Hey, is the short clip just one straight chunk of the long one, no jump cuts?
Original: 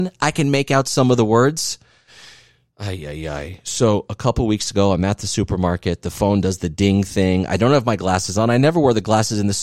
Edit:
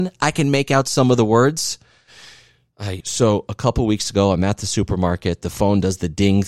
no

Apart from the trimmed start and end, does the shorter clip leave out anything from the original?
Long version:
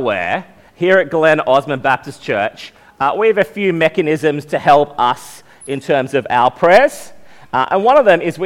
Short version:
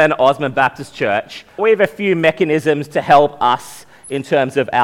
yes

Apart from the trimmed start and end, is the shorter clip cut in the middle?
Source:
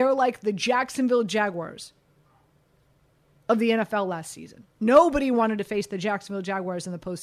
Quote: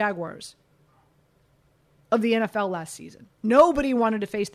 no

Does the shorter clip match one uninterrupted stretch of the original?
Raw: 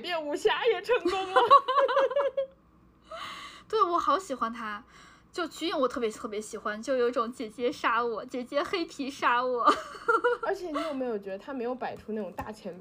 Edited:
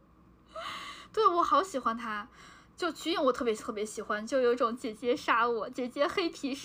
yes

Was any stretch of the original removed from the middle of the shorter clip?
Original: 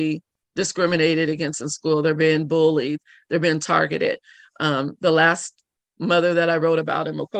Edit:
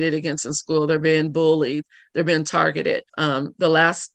yes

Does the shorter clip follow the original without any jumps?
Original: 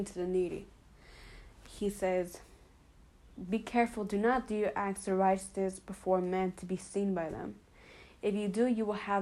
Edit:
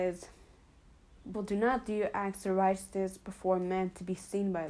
no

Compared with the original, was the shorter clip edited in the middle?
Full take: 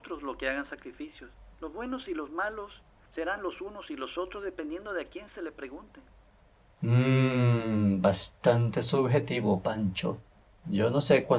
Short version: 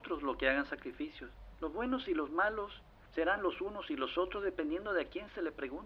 no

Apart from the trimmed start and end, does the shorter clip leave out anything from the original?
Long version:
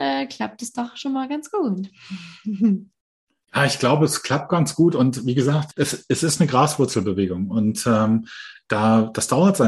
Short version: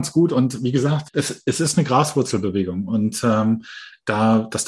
no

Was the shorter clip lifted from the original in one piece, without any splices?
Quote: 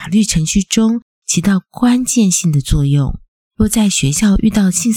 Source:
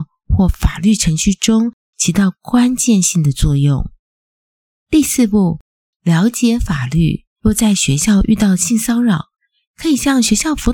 no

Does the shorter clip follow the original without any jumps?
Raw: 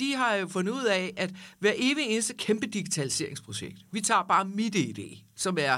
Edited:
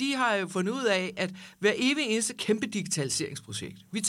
yes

